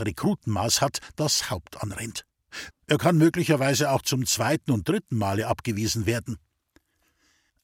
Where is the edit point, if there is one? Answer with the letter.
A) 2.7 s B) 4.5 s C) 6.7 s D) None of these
A